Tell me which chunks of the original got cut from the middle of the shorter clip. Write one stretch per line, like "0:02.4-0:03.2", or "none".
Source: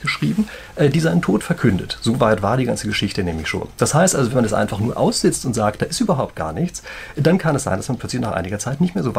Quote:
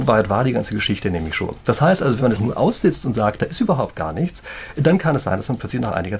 0:04.5-0:04.8